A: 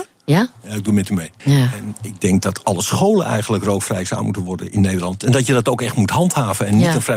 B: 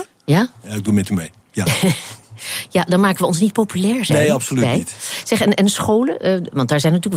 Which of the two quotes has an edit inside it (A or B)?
A